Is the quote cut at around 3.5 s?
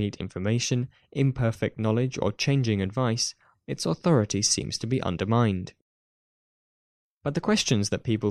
yes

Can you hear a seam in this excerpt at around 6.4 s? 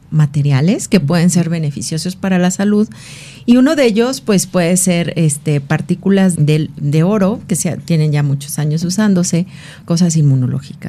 yes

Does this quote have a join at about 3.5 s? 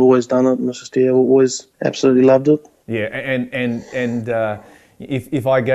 no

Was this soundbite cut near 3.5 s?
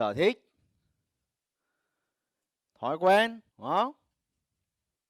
yes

